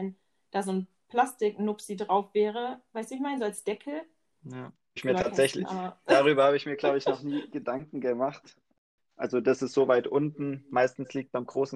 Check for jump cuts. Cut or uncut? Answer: cut